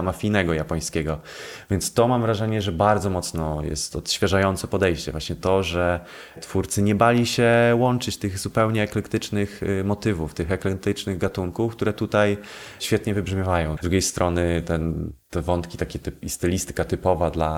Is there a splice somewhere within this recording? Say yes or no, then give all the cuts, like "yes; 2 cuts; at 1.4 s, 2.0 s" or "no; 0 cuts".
yes; 2 cuts; at 13.8 s, 15.2 s